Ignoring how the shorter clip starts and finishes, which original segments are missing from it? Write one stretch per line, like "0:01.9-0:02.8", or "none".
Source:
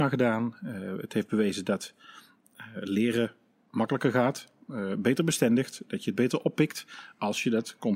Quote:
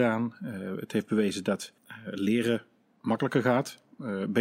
0:02.0-0:02.5